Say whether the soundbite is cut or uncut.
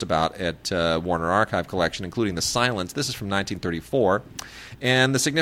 uncut